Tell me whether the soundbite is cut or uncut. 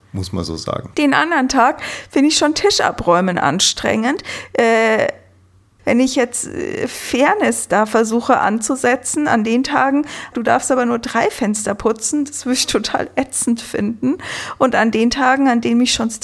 cut